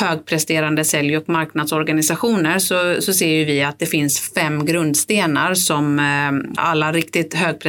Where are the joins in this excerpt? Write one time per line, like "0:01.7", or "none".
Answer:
0:06.6